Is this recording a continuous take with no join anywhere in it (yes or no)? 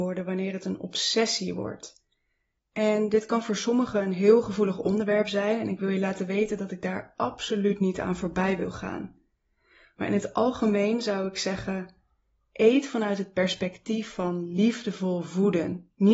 yes